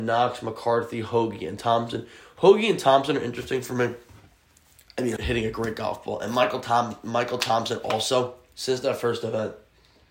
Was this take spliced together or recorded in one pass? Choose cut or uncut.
cut